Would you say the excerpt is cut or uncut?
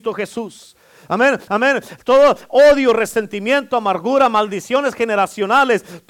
cut